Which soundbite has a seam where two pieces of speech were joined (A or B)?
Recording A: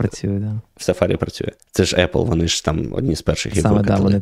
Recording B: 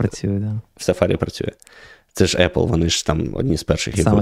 A